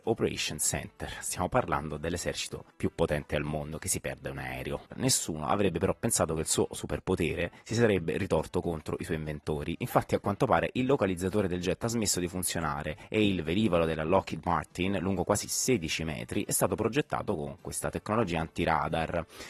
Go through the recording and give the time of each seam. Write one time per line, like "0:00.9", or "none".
0:04.9